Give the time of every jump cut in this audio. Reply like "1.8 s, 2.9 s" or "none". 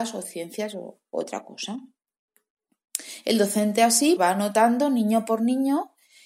4.2 s